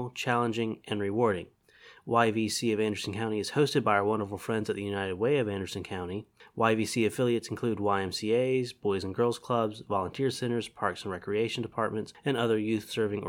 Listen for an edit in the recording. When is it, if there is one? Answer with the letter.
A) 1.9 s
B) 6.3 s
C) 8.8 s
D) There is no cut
D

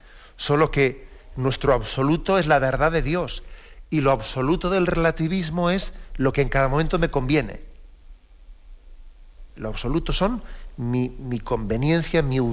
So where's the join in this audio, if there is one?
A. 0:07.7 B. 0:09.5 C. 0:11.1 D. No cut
B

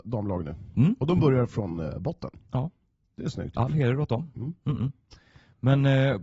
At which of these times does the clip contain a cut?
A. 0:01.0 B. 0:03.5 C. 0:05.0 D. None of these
D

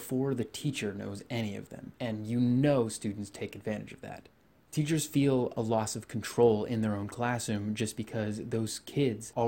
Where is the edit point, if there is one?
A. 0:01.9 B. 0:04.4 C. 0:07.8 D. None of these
A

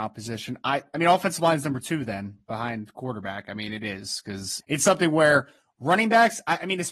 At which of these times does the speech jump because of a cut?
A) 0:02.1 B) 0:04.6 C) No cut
B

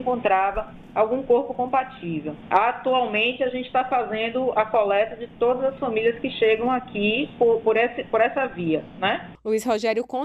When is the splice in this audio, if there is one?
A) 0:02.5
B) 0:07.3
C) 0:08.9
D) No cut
D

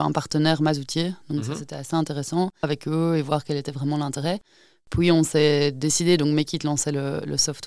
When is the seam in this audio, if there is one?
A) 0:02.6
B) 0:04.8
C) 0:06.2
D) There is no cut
A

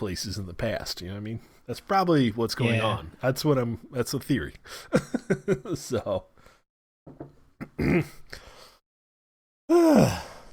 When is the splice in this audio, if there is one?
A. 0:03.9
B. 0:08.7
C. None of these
C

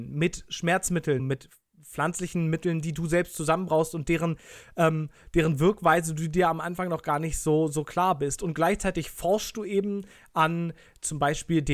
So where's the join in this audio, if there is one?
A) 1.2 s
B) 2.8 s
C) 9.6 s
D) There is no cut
A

